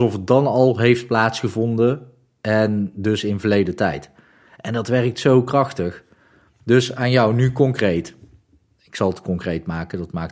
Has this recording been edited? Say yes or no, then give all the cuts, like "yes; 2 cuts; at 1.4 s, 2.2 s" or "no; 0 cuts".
no; 0 cuts